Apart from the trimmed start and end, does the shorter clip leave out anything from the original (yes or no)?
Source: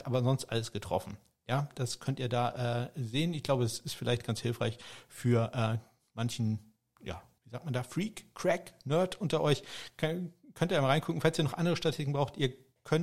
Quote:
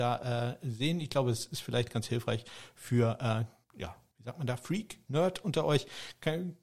yes